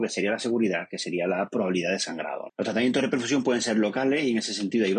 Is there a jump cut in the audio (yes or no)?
yes